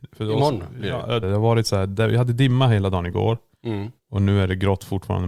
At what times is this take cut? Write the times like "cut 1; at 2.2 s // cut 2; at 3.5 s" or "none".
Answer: cut 1; at 1.2 s